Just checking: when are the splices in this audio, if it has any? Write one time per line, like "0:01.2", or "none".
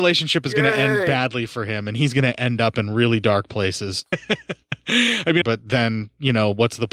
0:04.1
0:05.4